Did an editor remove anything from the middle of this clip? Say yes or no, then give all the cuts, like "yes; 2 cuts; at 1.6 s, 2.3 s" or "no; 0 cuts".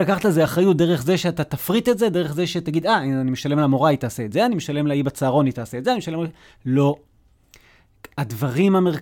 no; 0 cuts